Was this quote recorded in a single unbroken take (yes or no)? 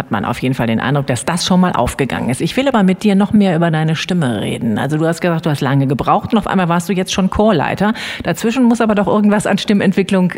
yes